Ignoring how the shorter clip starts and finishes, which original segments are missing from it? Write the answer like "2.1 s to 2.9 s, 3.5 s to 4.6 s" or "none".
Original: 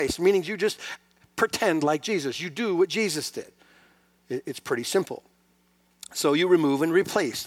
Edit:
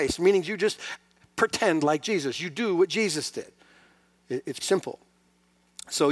4.6 s to 4.8 s